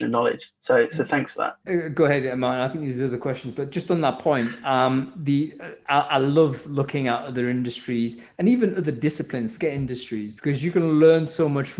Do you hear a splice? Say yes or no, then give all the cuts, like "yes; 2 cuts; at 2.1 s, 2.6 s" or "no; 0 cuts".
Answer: yes; 1 cut; at 1.6 s